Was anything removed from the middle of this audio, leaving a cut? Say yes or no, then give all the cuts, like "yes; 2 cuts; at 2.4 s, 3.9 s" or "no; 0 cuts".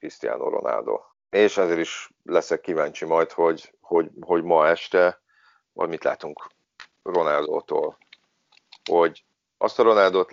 yes; 1 cut; at 1.1 s